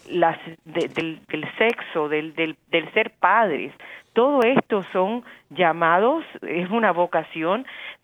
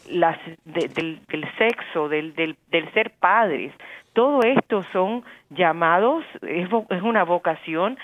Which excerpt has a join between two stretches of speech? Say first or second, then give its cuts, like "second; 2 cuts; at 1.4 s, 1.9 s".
first; 1 cut; at 6.7 s